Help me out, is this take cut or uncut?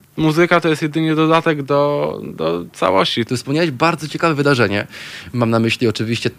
cut